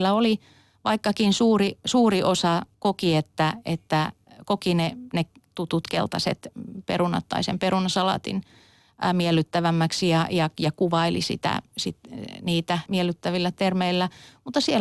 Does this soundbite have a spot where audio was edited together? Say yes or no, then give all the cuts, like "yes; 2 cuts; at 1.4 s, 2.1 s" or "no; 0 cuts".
yes; 2 cuts; at 2.7 s, 12.9 s